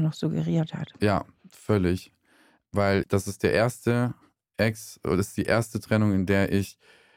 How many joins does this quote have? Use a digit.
1